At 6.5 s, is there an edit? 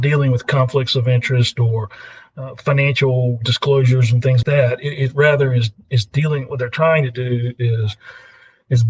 no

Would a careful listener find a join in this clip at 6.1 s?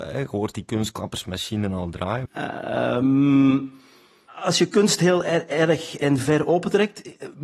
no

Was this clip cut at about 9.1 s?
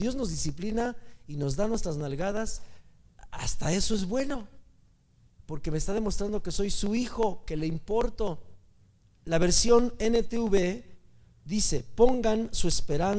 no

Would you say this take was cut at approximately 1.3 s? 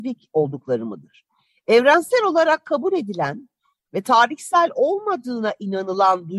no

